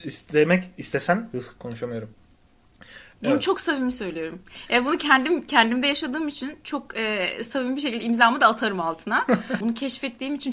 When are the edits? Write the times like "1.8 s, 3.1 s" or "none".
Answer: 3.2 s, 9.6 s